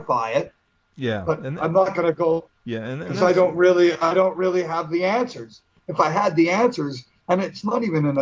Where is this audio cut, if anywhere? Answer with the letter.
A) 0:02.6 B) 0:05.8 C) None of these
A